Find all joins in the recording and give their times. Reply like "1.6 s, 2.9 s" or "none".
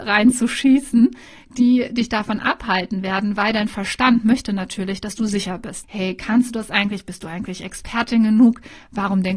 5.8 s